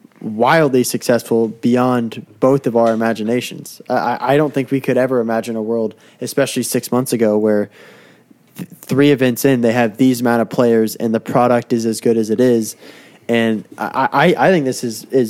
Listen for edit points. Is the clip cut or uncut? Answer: uncut